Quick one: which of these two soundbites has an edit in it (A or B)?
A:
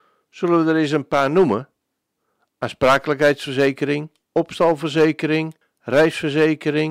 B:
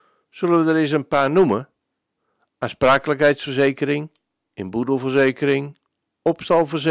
A